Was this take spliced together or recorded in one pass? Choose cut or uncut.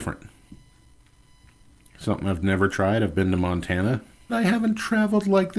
cut